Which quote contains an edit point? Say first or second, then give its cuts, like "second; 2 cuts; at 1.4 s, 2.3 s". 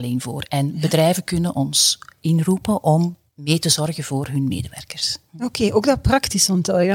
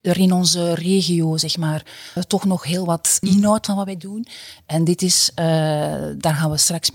second; 2 cuts; at 2.2 s, 3.2 s